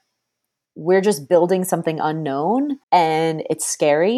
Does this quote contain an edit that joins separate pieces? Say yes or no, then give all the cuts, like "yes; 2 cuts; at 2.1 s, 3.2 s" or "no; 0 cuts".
yes; 1 cut; at 2.8 s